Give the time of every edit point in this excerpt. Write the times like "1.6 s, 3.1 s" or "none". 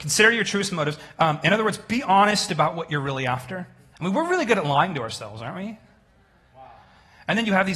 3.9 s, 6.5 s